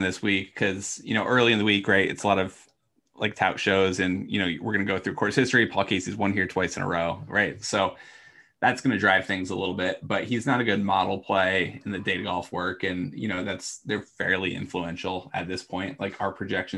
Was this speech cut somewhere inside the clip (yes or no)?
no